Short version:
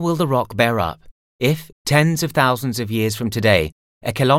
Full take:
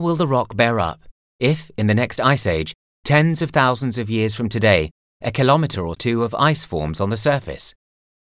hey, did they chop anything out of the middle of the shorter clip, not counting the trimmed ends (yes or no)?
yes